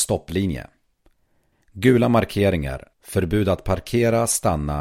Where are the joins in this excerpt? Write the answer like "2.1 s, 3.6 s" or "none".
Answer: 1.5 s, 2.9 s

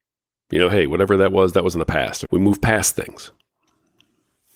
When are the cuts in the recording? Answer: 2.3 s

